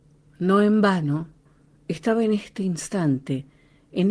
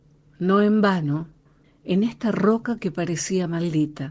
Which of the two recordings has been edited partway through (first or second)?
second